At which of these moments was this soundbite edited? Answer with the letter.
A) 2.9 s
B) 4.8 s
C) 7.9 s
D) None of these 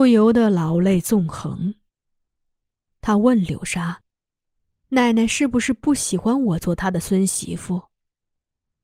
A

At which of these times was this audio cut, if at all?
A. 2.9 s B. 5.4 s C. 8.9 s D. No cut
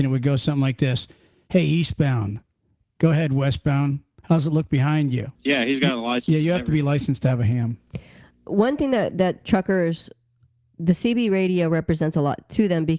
B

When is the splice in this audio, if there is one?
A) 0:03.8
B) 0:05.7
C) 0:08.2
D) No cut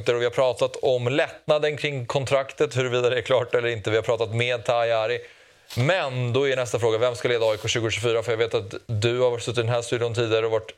D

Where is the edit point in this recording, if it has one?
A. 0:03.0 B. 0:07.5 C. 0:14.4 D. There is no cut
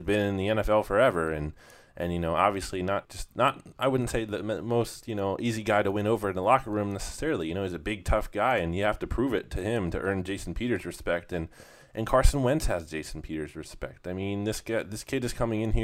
A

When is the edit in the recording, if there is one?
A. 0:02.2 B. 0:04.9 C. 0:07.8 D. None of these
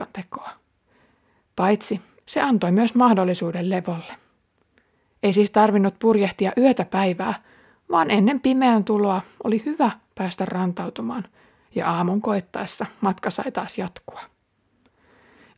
A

